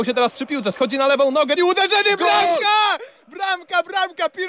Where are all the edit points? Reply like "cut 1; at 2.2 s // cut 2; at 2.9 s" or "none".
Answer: cut 1; at 1.6 s